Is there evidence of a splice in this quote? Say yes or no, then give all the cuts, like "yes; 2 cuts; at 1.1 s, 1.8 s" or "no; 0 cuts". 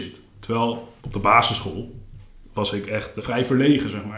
yes; 2 cuts; at 1.0 s, 3.2 s